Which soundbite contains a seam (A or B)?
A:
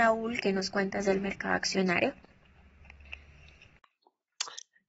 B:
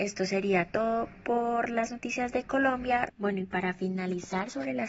B